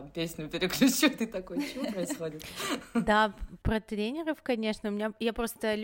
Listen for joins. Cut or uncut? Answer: uncut